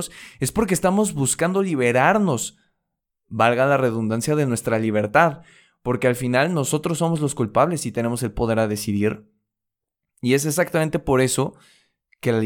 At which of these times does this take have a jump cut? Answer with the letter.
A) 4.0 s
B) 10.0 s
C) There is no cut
C